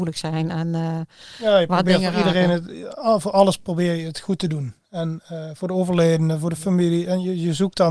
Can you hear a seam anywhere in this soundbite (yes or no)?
no